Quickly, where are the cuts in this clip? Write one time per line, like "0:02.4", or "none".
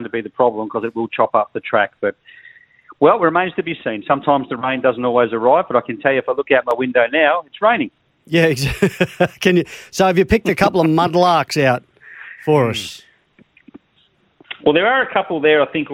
none